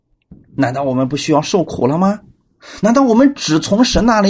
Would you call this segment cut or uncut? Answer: uncut